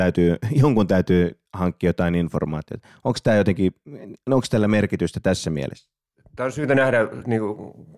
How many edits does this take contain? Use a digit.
0